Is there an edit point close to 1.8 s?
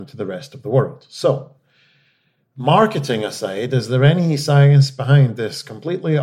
no; 0 cuts

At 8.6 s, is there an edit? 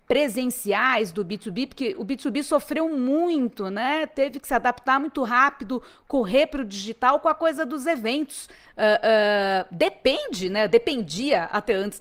yes; 1 cut; at 8.6 s

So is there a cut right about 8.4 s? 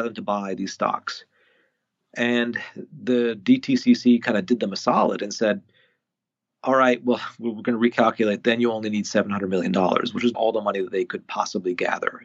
no; 1 cut; at 10.3 s

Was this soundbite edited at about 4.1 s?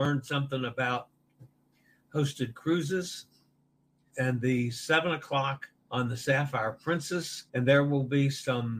yes; 3 cuts; at 4.1 s, 5.8 s, 7.5 s

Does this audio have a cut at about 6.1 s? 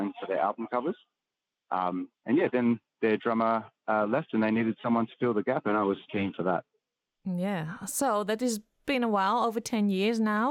yes; 1 cut; at 6.1 s

